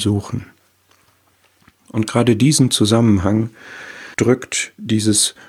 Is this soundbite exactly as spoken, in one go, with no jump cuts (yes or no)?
no